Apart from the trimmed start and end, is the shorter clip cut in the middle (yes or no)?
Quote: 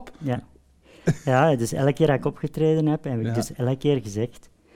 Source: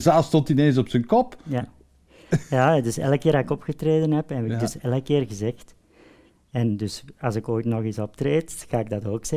no